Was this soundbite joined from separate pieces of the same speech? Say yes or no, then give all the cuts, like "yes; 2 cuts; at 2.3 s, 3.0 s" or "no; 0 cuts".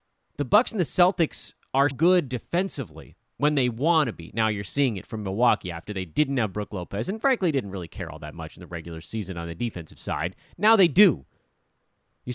yes; 1 cut; at 1.9 s